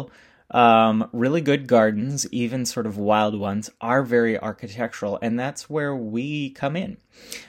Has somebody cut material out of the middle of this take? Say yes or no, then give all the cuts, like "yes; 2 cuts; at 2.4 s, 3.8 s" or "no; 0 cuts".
no; 0 cuts